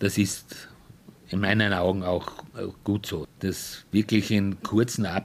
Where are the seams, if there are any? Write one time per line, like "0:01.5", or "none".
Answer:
0:03.2